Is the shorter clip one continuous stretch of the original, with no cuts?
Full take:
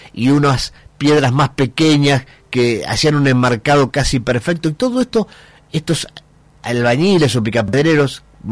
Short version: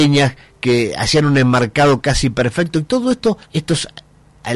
no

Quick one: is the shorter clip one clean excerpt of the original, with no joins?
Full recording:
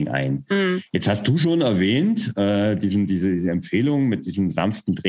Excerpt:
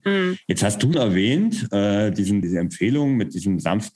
no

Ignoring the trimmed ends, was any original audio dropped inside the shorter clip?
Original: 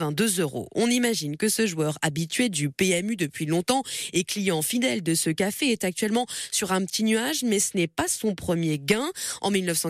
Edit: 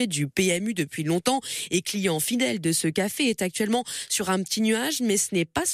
no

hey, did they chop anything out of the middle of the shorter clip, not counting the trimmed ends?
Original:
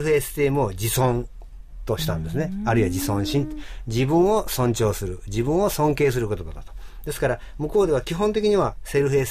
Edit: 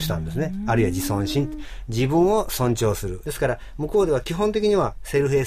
yes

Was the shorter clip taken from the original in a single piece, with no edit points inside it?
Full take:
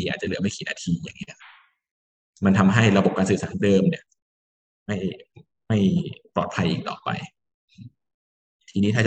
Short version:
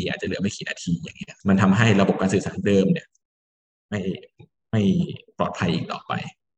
no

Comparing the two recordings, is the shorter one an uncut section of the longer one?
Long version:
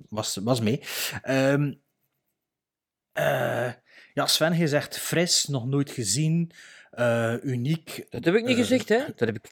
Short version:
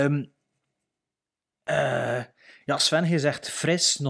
yes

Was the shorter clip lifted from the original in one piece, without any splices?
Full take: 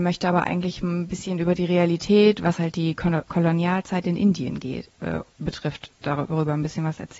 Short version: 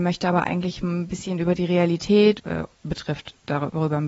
no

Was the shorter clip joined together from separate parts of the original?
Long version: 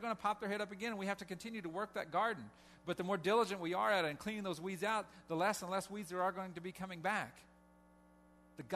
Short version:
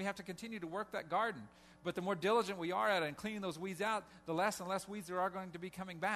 no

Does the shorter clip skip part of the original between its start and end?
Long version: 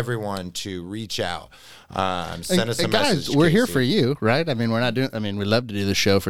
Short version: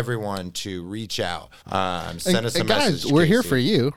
yes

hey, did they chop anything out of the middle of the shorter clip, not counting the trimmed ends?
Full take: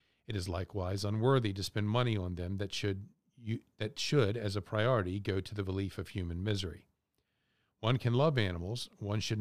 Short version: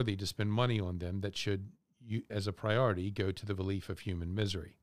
yes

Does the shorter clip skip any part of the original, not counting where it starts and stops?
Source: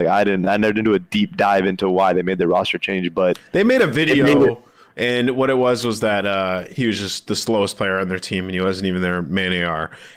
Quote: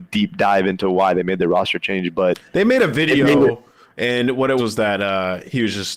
yes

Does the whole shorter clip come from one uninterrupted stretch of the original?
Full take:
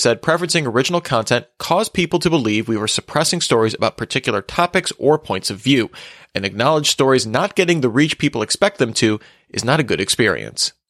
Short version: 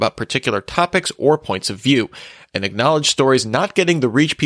yes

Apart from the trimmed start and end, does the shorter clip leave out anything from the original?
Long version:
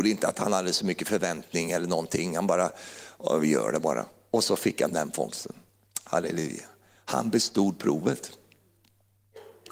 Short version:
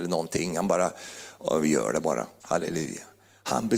yes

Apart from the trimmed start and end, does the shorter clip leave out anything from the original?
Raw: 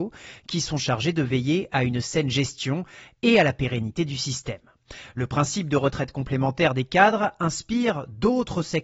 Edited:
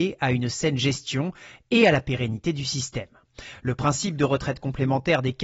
no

